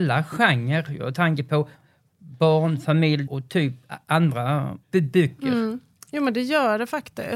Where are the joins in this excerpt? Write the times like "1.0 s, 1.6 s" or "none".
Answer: 3.3 s, 4.8 s